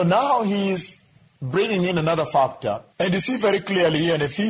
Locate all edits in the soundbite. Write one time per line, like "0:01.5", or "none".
0:02.9